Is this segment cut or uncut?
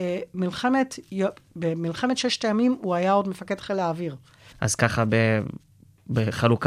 cut